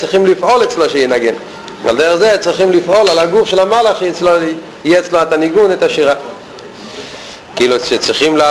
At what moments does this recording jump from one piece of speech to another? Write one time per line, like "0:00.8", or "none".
0:07.5